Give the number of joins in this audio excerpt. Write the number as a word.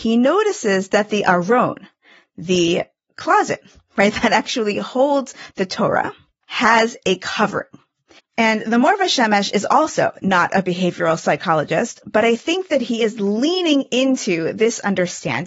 two